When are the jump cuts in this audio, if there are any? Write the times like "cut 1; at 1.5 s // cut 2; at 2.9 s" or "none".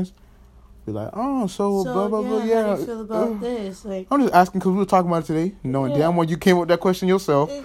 none